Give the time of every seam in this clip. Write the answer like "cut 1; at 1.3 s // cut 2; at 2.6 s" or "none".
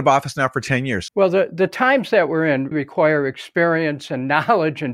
cut 1; at 1.1 s // cut 2; at 2.7 s